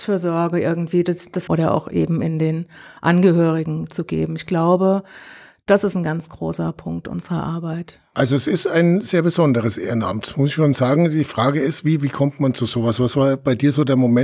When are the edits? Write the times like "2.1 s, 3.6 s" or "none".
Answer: 1.5 s